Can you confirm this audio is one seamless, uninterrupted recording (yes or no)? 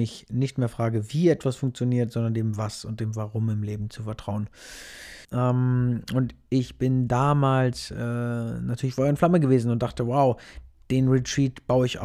no